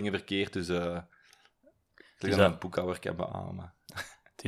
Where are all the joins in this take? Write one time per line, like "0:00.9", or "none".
none